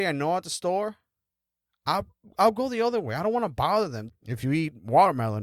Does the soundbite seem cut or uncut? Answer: cut